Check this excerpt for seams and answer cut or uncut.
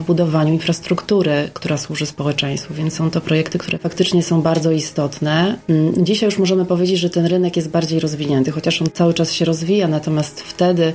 uncut